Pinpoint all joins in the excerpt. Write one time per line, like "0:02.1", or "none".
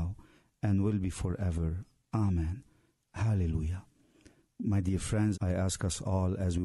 0:05.3

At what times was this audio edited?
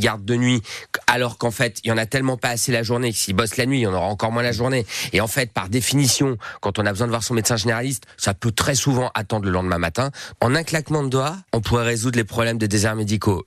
0:10.3
0:11.5

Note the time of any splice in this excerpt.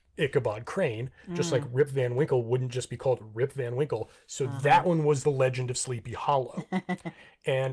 none

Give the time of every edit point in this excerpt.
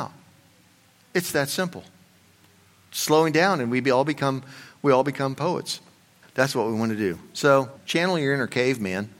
0:06.2
0:07.8

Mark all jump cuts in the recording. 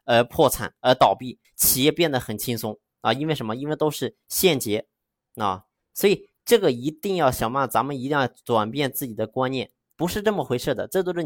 0:01.4
0:09.9

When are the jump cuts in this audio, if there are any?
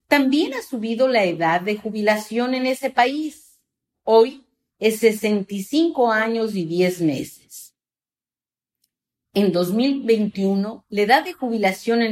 none

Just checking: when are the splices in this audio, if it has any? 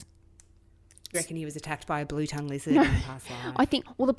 0:01.1

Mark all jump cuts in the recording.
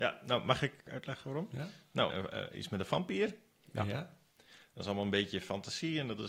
0:02.1

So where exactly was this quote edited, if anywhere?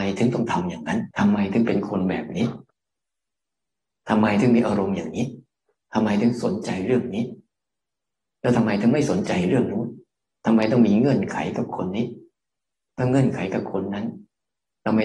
0:01.1

